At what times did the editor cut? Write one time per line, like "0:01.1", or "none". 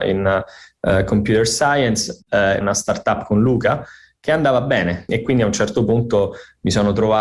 0:02.6
0:05.1